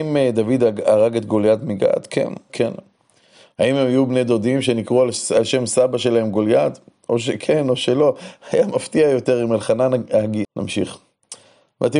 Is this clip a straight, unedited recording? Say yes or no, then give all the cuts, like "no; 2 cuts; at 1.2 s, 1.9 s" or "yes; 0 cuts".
no; 2 cuts; at 2.5 s, 10.4 s